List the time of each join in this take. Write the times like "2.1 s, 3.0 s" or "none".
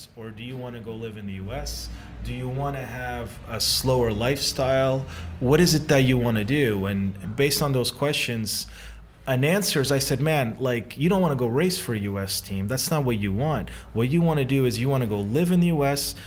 7.2 s